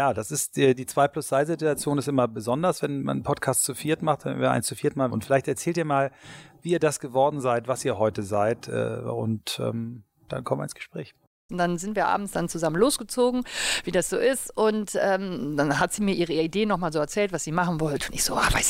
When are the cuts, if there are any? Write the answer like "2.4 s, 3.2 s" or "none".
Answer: 5.1 s, 11.5 s